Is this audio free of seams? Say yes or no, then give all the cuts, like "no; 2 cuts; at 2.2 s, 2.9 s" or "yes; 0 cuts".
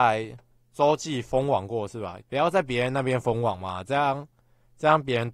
no; 1 cut; at 2.2 s